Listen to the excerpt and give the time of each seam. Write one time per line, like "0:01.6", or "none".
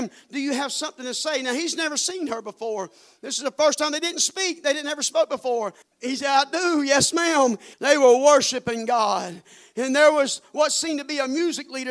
0:05.8
0:07.7